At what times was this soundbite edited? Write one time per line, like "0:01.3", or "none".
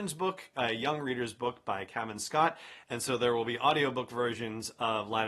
0:02.8